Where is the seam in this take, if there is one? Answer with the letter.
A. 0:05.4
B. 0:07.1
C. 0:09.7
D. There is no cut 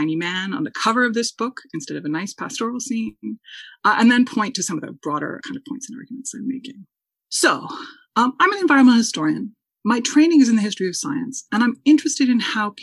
A